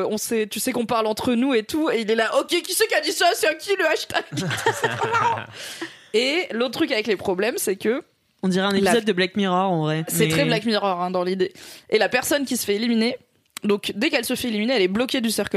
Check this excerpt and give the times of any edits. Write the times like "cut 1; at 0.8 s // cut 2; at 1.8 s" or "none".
none